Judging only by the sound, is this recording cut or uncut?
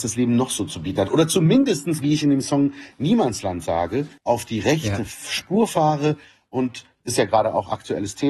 cut